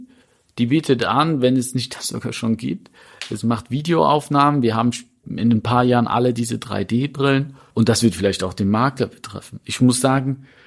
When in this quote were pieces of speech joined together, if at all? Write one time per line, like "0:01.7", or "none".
0:07.7